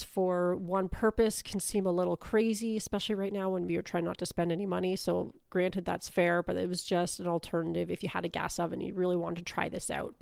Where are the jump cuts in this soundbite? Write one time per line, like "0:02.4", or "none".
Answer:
0:03.7